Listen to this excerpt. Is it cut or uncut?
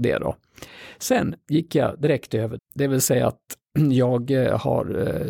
cut